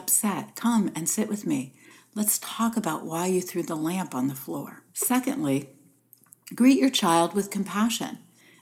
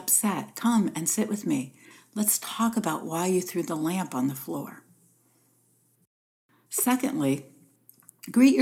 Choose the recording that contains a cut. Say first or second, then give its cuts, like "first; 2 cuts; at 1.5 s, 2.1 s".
first; 1 cut; at 4.9 s